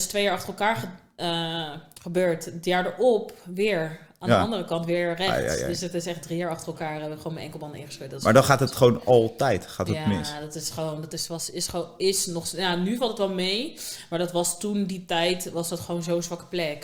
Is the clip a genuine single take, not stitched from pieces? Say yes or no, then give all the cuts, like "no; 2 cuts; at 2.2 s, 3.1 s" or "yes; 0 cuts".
yes; 0 cuts